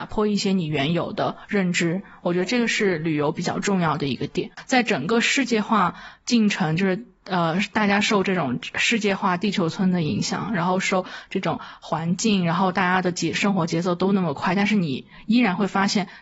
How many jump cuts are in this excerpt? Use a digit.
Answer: 0